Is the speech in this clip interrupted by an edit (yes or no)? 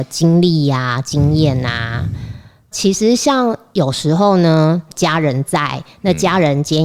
no